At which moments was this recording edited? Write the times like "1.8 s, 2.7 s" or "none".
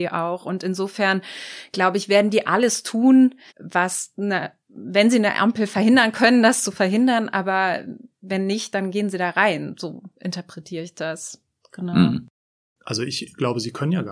3.5 s